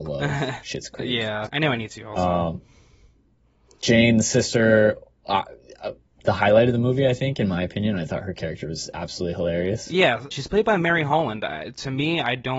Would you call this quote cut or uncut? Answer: cut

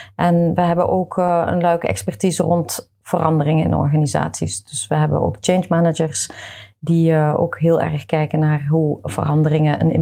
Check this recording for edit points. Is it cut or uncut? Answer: uncut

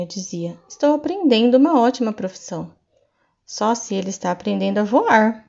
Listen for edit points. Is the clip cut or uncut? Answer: uncut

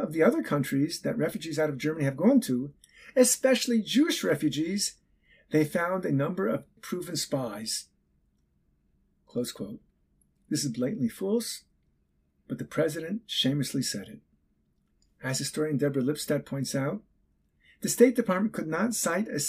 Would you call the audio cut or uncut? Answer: cut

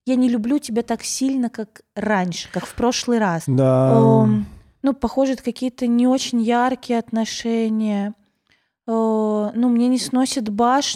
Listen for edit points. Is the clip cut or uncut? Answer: cut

